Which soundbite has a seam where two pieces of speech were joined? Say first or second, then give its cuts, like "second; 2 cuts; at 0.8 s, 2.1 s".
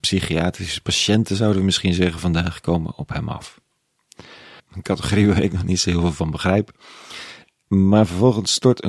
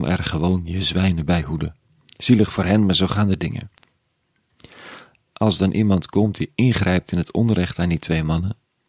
first; 1 cut; at 4.6 s